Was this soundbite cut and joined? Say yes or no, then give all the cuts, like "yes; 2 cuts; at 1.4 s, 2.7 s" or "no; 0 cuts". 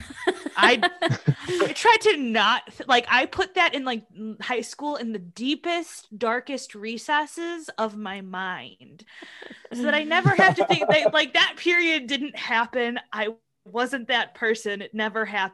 no; 0 cuts